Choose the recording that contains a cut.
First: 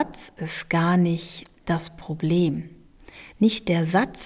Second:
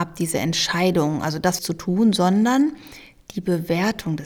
second; 1 cut; at 1.6 s

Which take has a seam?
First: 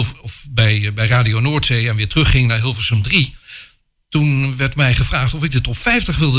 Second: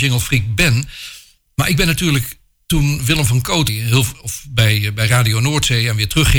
second; 1 cut; at 3.7 s

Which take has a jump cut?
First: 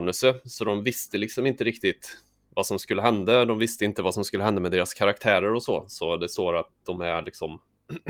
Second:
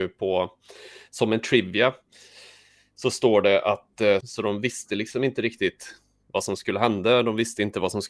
second; 1 cut; at 4.2 s

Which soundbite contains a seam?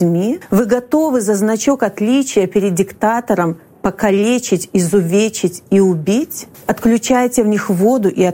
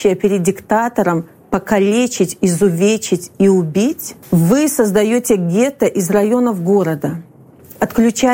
first; 1 cut; at 6.6 s

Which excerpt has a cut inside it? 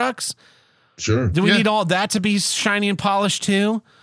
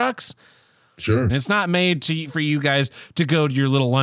second; 1 cut; at 1.3 s

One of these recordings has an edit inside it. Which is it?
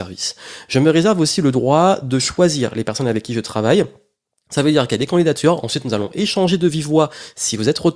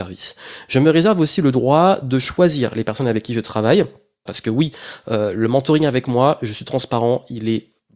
second; 1 cut; at 4.3 s

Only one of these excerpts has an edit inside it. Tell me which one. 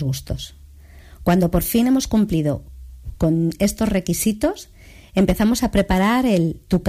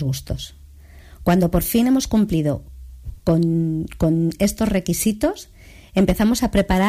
first; 1 cut; at 3.2 s

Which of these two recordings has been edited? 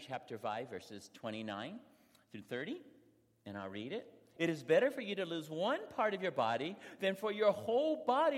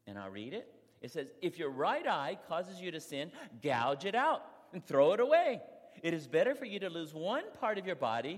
first; 1 cut; at 4.4 s

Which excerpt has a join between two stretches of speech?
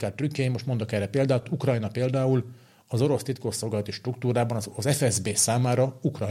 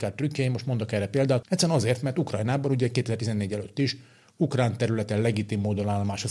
second; 1 cut; at 1.4 s

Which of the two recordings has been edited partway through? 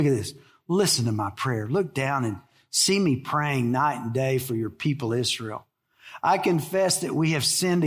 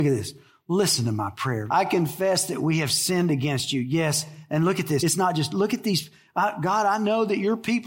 second; 2 cuts; at 1.7 s, 5.0 s

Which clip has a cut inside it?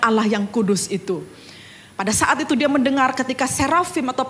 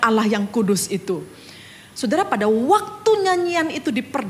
second; 1 cut; at 1.9 s

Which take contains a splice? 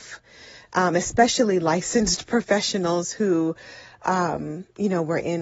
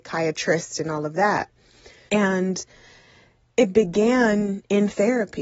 second; 1 cut; at 2.1 s

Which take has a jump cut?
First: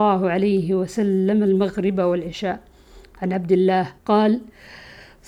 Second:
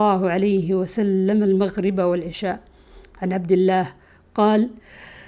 first; 1 cut; at 4.0 s

